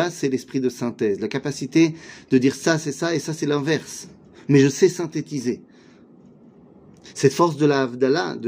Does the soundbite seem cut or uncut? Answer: cut